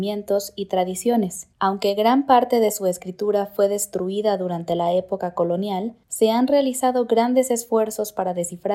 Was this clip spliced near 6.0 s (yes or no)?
yes